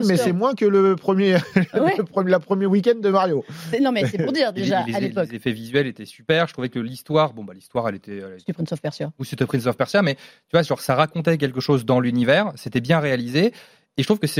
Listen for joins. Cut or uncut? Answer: uncut